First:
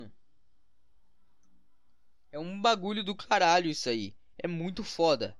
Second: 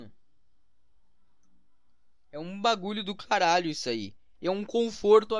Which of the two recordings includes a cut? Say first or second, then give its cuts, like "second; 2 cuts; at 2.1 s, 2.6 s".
second; 1 cut; at 4.3 s